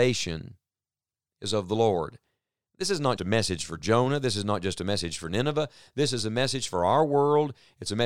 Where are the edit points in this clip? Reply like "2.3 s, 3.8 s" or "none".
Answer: 3.2 s